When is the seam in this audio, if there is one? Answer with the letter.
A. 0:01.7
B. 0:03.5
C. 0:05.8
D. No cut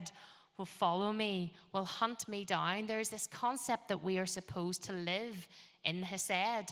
A